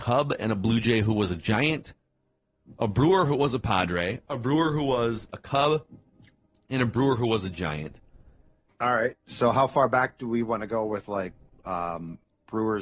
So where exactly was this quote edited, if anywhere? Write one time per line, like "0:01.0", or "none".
0:05.3
0:08.7